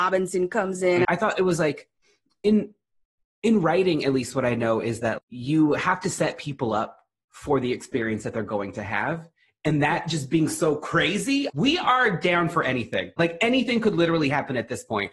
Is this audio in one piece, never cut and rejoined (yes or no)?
no